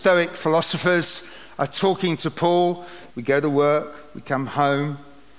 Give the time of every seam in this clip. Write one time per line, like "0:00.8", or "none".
0:03.1